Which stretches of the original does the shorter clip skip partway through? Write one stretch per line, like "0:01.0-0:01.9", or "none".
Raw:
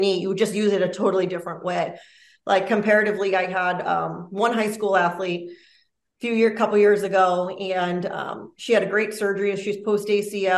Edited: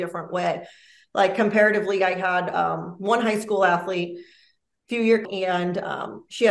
0:06.6-0:07.5